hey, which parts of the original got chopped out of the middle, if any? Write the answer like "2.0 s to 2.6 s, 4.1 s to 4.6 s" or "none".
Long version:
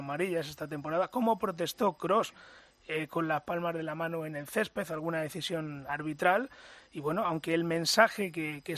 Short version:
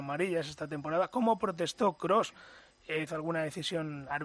3.1 s to 4.9 s